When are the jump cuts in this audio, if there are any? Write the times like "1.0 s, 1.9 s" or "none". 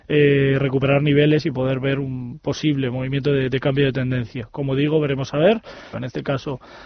5.9 s